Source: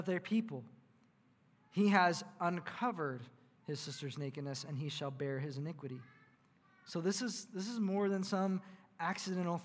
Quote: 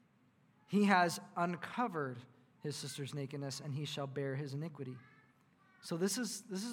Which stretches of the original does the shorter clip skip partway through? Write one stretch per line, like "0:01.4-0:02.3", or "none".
none